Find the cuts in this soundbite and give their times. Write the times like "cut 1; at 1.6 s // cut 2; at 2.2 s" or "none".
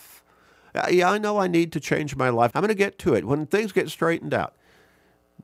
cut 1; at 2.5 s

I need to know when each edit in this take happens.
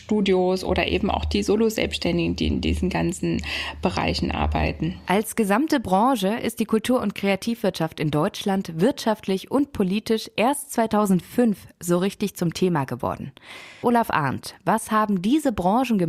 cut 1; at 13.8 s

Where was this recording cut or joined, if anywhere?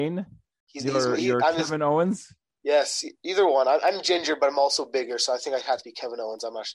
none

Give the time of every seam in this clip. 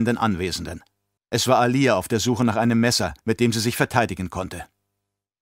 cut 1; at 1.2 s // cut 2; at 3.2 s

